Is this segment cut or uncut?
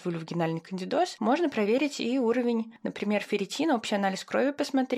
uncut